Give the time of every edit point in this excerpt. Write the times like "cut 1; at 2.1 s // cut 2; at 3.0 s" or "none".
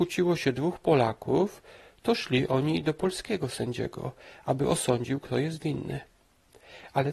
none